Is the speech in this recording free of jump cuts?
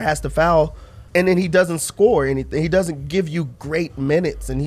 no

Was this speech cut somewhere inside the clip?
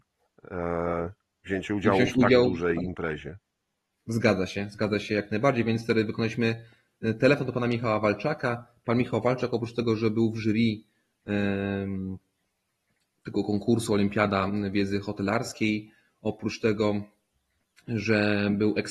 no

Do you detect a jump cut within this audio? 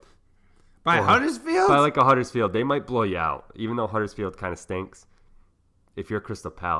no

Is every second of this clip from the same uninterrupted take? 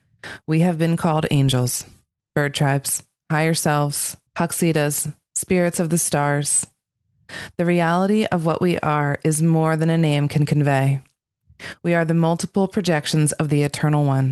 no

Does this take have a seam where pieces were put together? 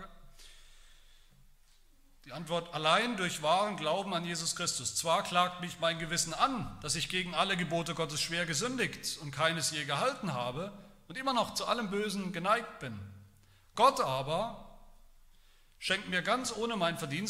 no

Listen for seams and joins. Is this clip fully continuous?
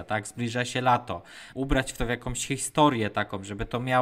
no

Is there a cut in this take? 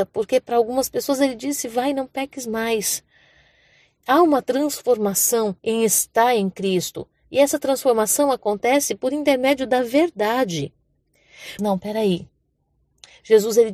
yes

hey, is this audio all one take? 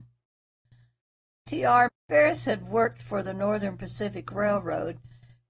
no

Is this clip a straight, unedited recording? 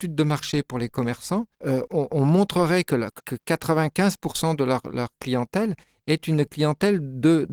no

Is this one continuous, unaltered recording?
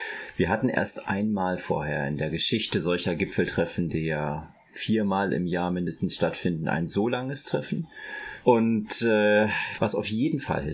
no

